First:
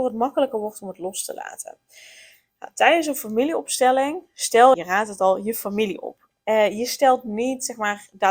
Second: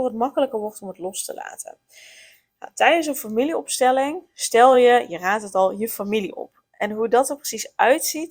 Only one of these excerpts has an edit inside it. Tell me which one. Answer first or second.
first